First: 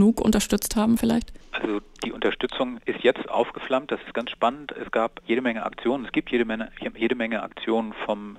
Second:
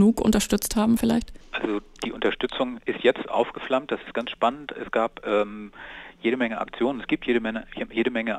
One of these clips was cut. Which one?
first; 1 cut; at 5.2 s

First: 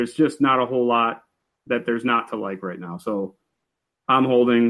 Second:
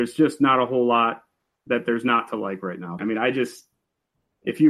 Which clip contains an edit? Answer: second; 1 cut; at 3.0 s

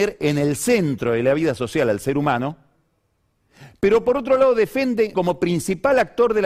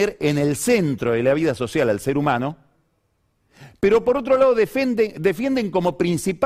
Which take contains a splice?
first; 1 cut; at 5.1 s

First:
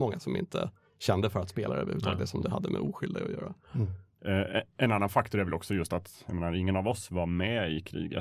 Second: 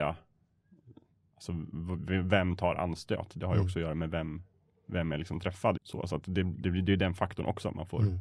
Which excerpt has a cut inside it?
second; 1 cut; at 5.8 s

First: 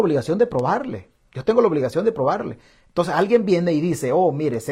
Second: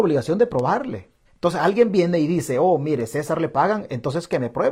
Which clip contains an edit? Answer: second; 1 cut; at 1.3 s

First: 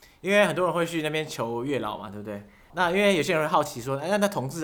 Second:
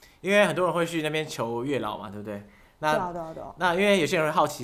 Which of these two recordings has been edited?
first; 1 cut; at 2.7 s

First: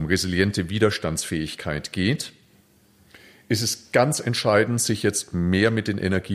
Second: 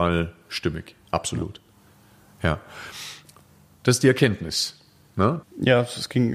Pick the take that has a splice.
second; 1 cut; at 5.4 s

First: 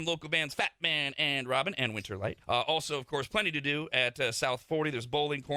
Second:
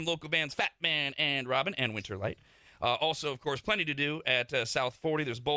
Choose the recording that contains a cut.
first; 1 cut; at 2.4 s

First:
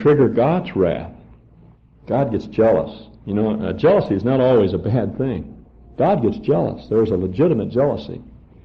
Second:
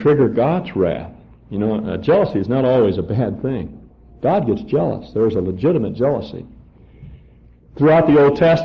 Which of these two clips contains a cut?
second; 1 cut; at 1.4 s

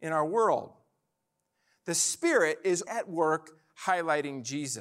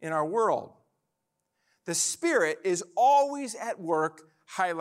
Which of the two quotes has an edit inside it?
first; 1 cut; at 2.9 s

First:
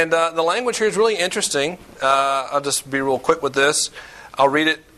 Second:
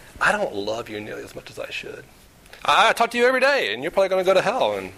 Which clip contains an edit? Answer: second; 1 cut; at 2.6 s

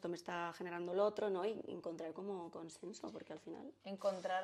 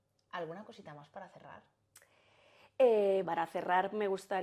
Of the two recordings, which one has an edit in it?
second; 1 cut; at 3.2 s

